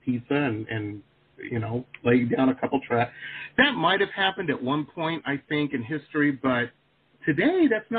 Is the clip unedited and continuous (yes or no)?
yes